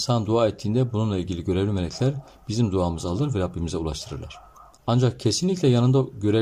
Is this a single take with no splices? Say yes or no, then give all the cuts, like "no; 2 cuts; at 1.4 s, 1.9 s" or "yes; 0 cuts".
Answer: yes; 0 cuts